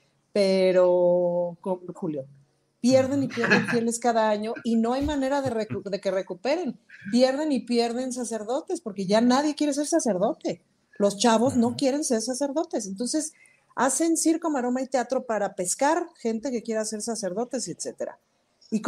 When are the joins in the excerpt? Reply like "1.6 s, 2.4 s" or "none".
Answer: 1.9 s